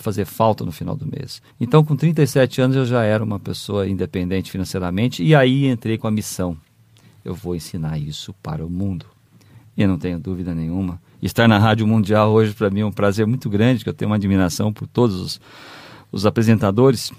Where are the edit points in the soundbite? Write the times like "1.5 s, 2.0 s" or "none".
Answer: 1.5 s